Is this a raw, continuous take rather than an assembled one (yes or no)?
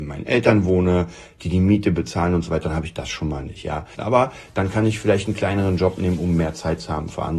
no